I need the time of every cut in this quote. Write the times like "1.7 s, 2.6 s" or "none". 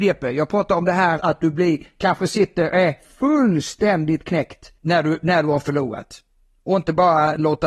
1.2 s, 4.8 s

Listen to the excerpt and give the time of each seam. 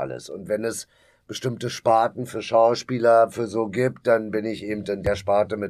3.3 s

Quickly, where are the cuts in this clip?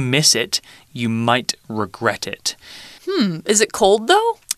3.0 s

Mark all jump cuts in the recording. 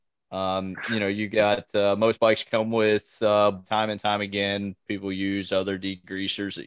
3.6 s

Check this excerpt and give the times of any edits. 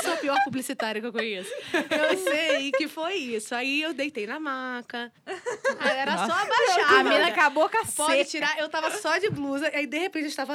5.2 s

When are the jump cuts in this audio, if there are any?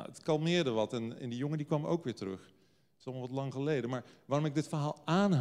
1.2 s

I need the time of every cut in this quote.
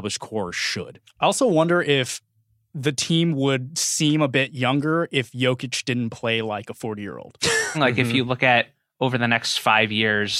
7.7 s

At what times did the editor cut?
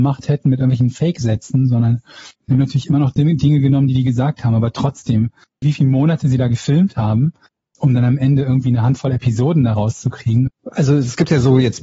5.6 s, 10.5 s

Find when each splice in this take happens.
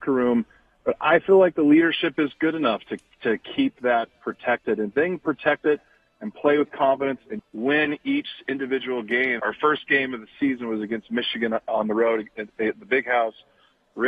7.4 s, 9.4 s

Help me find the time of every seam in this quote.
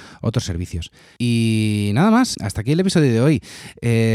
2.3 s

